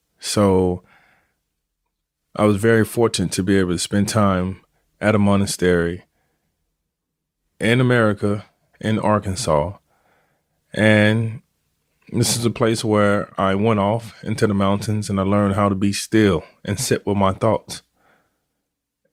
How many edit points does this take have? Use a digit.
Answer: 1